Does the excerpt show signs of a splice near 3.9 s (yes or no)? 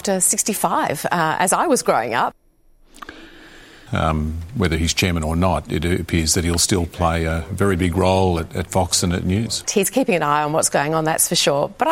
yes